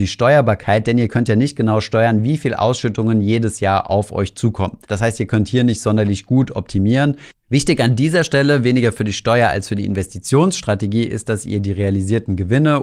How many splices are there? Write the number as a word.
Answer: one